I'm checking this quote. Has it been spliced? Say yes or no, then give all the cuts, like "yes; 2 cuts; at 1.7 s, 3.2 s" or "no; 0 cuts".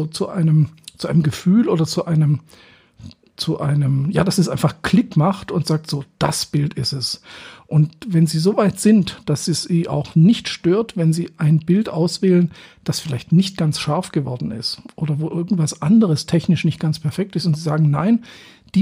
no; 0 cuts